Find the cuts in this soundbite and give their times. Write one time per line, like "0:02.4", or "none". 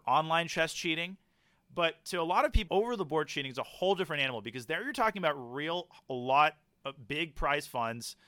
0:02.7